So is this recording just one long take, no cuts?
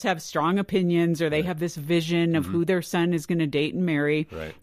yes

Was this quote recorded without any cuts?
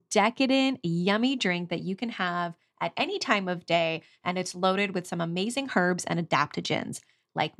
yes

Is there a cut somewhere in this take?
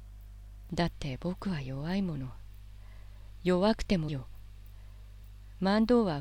yes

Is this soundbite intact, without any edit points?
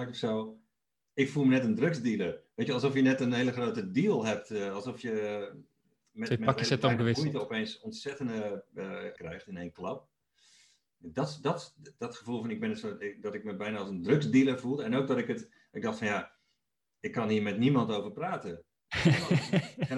no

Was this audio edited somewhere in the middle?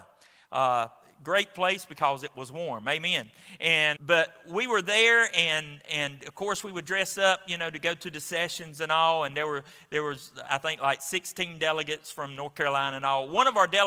yes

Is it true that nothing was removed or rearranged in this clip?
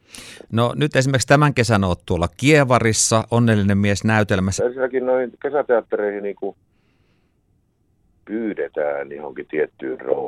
no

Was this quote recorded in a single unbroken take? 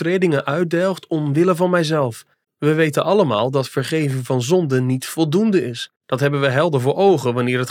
no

